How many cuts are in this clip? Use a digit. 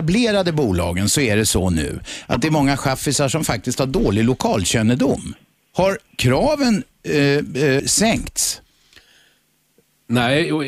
1